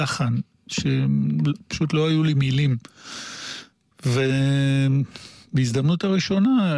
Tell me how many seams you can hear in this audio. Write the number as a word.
zero